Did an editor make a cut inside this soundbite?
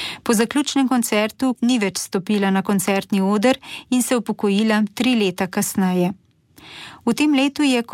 yes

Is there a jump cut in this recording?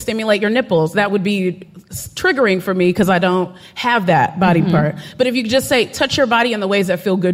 no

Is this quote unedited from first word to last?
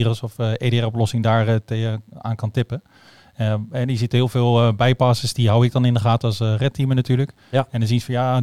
yes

